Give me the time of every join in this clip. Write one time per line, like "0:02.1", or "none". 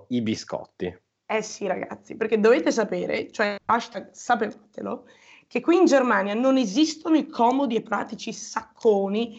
none